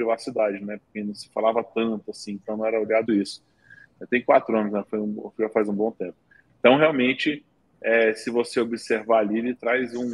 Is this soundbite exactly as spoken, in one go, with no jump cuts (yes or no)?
no